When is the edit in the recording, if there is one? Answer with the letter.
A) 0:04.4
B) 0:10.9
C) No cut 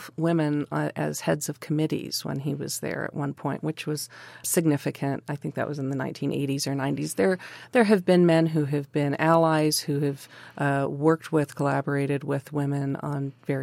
A